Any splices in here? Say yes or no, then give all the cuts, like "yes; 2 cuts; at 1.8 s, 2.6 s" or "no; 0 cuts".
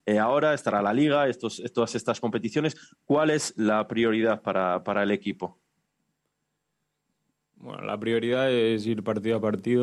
no; 0 cuts